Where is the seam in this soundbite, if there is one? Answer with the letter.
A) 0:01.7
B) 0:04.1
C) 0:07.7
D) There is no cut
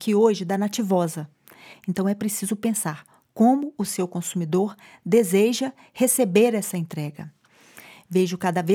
A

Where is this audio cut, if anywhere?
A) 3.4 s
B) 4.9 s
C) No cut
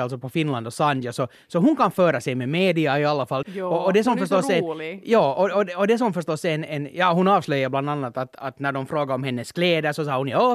A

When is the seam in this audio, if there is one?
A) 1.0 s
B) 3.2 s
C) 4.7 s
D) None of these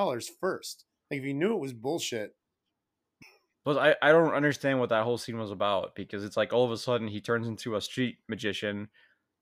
B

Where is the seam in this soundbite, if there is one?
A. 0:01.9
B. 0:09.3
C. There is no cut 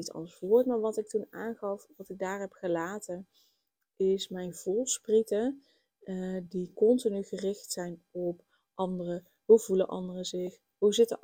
A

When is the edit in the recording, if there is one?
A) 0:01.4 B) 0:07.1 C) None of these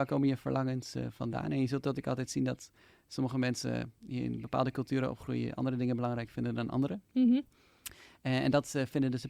C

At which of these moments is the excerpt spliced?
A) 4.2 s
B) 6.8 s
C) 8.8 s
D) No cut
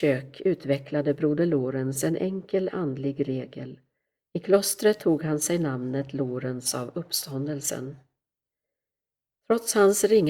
A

